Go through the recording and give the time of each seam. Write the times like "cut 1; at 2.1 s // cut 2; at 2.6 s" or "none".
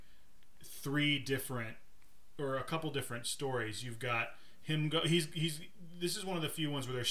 none